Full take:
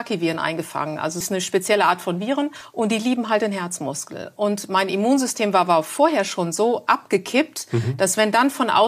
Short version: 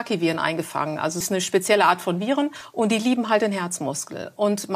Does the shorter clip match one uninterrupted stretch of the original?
yes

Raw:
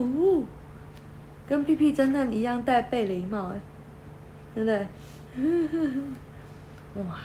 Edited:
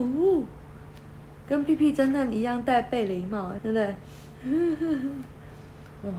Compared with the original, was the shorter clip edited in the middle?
yes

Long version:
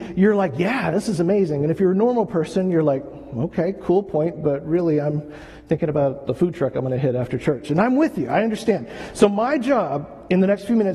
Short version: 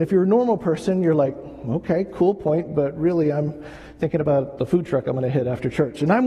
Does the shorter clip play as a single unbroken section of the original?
yes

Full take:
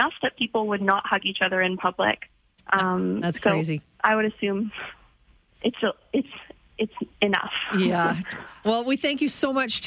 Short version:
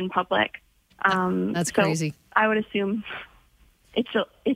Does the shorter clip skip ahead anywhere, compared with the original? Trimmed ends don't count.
no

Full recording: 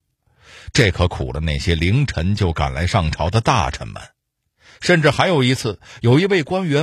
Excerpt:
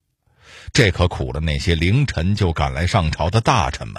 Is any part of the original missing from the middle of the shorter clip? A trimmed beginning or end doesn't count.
no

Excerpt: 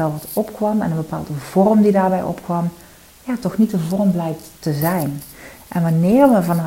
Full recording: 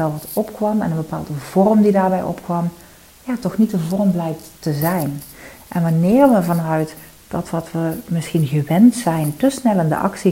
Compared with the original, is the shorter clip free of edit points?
yes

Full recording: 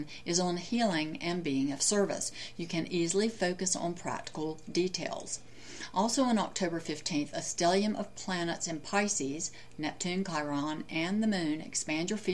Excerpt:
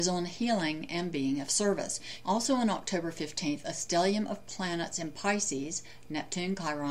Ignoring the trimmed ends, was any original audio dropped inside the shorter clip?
yes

